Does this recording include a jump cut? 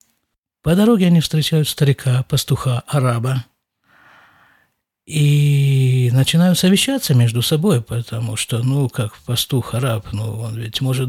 no; 0 cuts

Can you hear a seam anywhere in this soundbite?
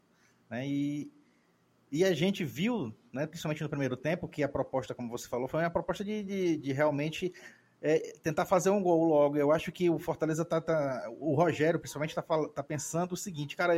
no; 0 cuts

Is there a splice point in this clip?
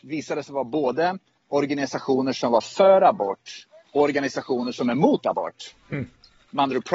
no; 0 cuts

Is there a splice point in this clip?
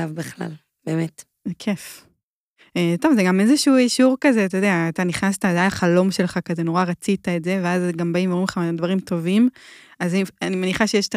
no; 0 cuts

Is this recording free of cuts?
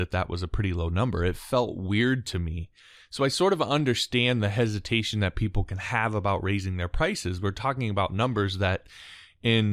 yes; 0 cuts

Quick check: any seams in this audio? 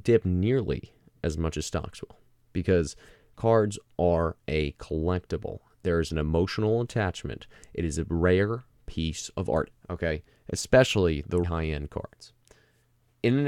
yes; 2 cuts; at 9.7 s, 11.4 s

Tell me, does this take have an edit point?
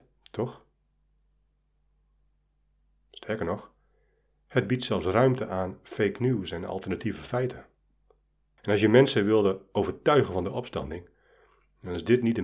yes; 1 cut; at 8.6 s

